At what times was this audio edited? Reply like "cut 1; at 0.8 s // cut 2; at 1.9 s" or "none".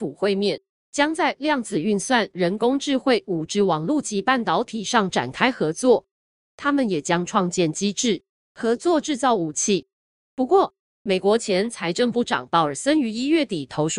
none